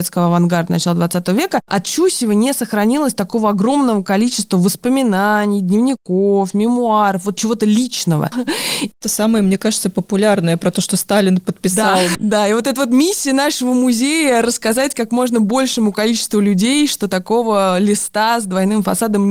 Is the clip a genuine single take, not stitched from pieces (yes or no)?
no